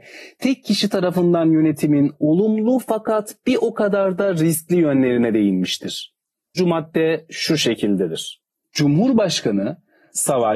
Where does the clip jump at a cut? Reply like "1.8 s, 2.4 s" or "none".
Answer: 6.6 s